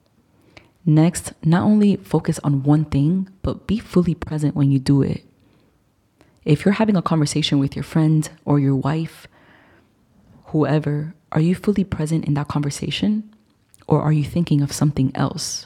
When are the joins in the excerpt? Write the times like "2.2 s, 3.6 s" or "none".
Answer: none